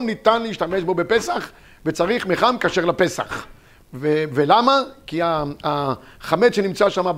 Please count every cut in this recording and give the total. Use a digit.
0